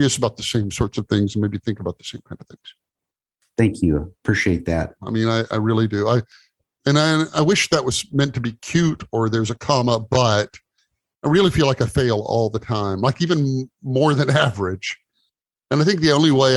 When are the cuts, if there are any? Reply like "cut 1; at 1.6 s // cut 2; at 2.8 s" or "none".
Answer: cut 1; at 5.0 s